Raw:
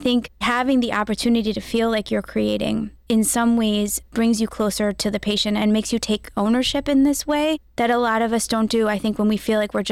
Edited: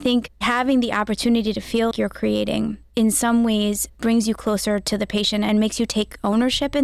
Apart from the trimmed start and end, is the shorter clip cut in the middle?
yes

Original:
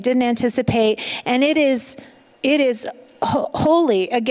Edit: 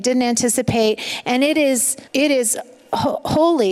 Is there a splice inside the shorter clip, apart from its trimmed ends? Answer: yes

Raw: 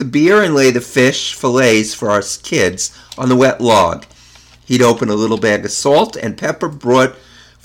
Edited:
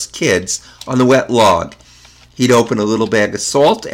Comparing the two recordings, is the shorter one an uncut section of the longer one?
yes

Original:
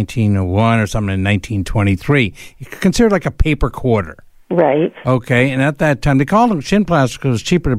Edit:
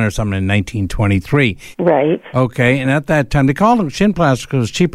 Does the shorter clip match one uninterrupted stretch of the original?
no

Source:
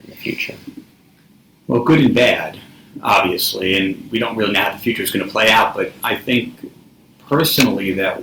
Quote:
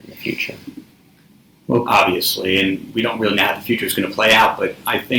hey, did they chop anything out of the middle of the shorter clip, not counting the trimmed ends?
yes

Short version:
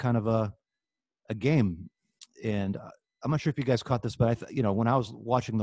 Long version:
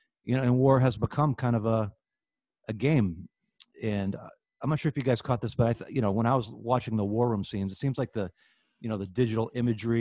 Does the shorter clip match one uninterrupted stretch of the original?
yes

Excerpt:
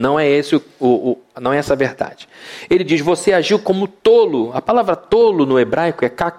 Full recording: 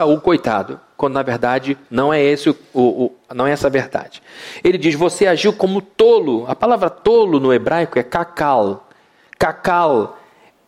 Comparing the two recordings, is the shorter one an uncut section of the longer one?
yes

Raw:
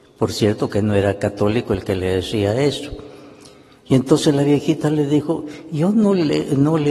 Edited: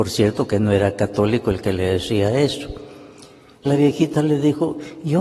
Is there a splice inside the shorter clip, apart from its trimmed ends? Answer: yes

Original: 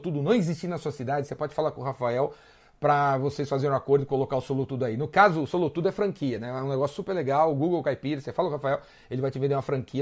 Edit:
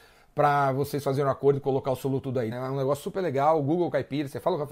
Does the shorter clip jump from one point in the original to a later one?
yes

